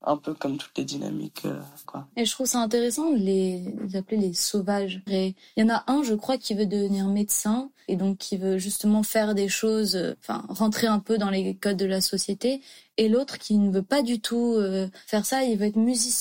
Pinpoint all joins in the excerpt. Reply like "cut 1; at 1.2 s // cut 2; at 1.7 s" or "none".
cut 1; at 1.8 s // cut 2; at 5.1 s